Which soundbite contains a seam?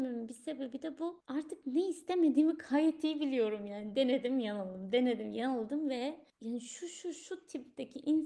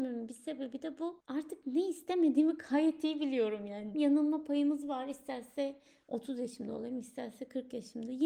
second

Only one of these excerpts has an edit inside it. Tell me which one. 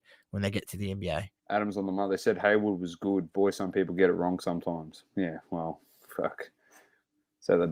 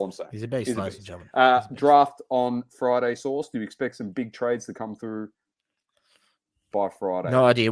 first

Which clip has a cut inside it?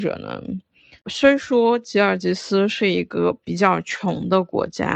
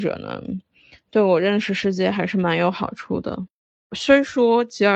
first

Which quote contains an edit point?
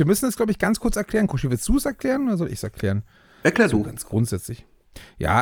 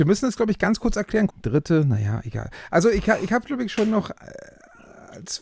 second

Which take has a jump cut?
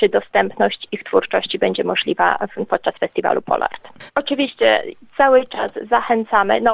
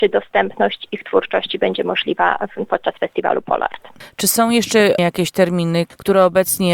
first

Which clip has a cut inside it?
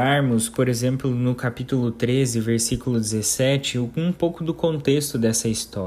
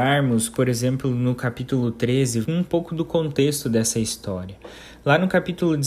second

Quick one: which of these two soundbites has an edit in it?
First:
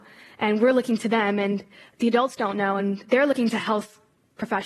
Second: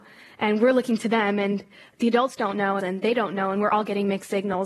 second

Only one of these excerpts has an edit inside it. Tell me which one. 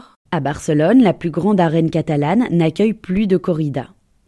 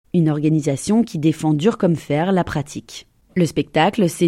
second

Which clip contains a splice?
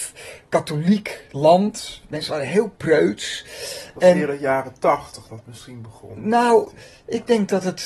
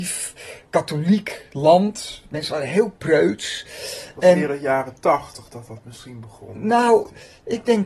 first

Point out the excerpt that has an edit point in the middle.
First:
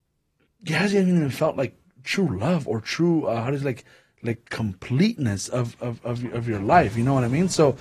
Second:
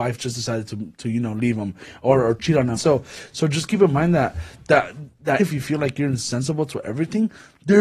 second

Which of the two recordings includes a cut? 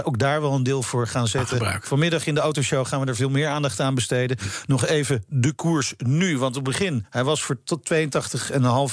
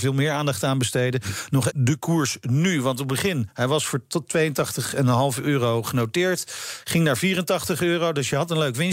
second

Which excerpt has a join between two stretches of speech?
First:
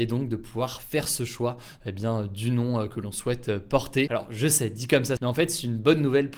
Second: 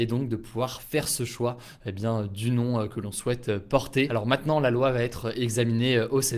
first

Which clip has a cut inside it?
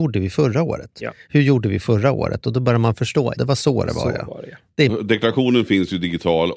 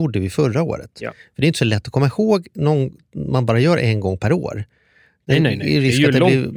first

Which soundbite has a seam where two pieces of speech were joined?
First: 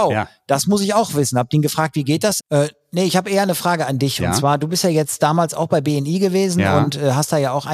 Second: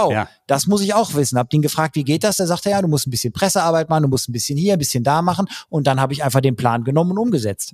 first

